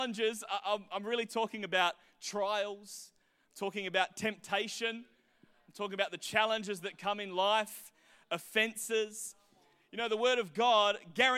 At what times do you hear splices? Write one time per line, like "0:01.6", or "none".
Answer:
none